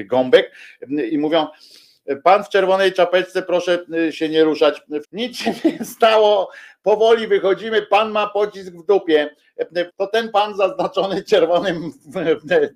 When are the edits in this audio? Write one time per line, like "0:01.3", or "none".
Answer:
0:05.0
0:09.9

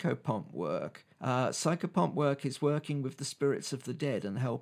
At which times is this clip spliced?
0:01.1

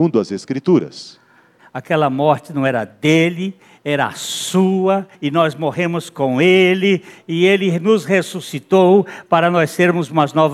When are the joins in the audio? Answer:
0:01.6
0:05.1

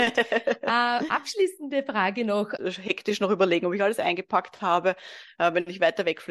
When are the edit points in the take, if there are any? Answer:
0:02.6

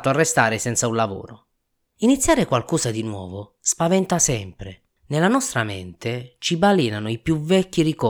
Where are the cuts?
0:05.0

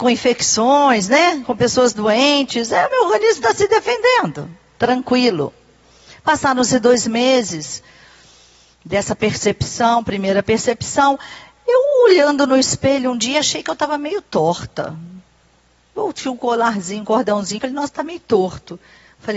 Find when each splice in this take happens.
0:17.6

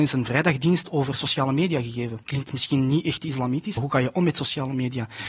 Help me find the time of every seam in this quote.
0:02.2
0:03.8

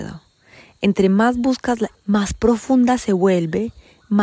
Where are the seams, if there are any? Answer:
0:01.9

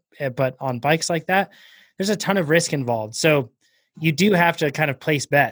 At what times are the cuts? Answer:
none

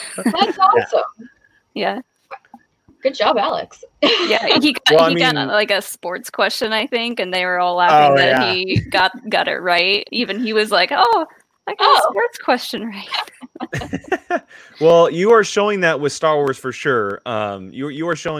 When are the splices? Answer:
0:10.1

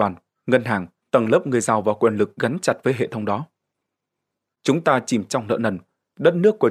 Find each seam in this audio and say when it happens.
0:01.0

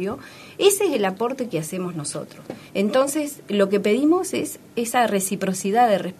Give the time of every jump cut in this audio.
0:02.7

